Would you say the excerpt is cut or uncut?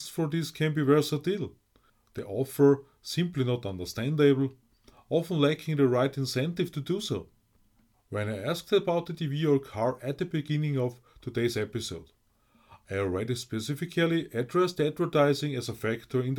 cut